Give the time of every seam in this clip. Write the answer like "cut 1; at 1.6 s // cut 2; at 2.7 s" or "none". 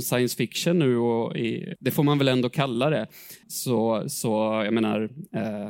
cut 1; at 1.7 s // cut 2; at 3.4 s

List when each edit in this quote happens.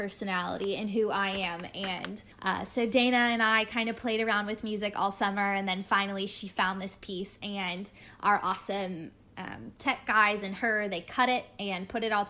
cut 1; at 2.3 s

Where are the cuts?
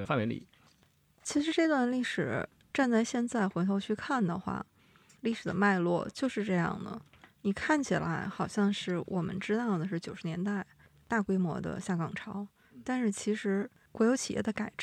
none

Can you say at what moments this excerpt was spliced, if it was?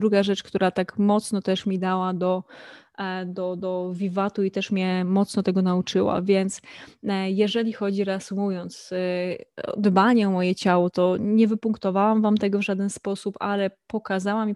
none

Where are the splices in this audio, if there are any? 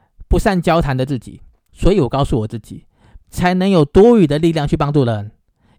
cut 1; at 1.7 s // cut 2; at 3.2 s

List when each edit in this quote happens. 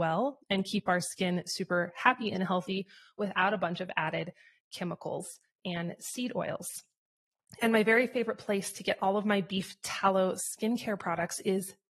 none

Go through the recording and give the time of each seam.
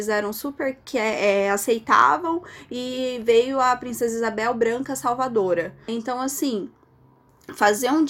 cut 1; at 5.9 s

